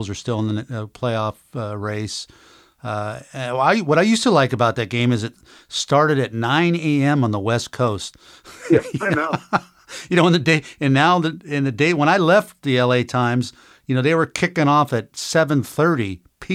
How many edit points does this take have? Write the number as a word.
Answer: zero